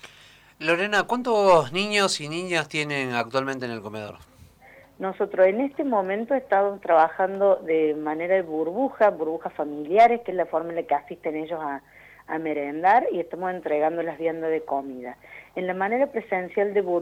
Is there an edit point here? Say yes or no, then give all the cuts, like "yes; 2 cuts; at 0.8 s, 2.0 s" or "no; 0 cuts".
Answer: no; 0 cuts